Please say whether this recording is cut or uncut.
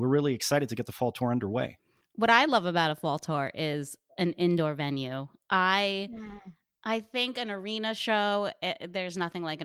uncut